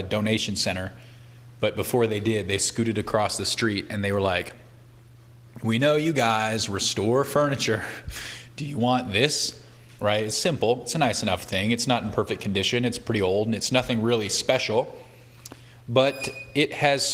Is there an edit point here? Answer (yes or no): yes